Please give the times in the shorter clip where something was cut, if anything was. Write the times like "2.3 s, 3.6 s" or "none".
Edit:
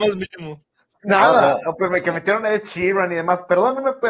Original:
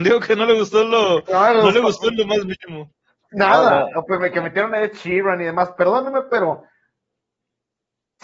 none